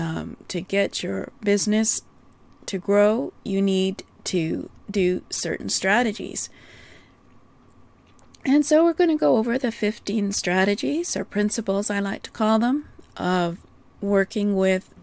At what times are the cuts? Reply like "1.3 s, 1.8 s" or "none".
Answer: none